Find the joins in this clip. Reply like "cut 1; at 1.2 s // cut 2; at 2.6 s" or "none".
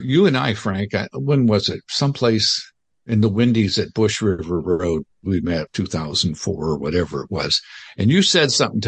cut 1; at 5.7 s